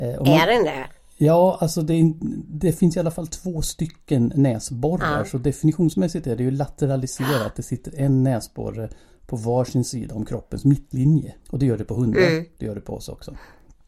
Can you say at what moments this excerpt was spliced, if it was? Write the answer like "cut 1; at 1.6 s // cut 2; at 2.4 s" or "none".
cut 1; at 11.4 s